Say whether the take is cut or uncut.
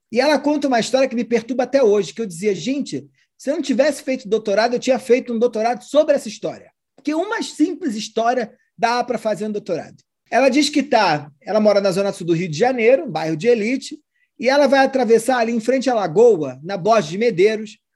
uncut